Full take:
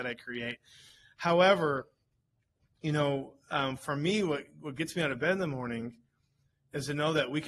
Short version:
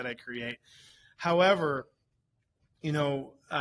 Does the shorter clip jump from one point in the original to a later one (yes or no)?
no